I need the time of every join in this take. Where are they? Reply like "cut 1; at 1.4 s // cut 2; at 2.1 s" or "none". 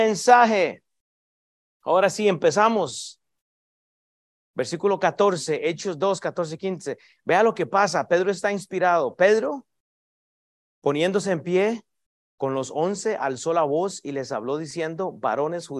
none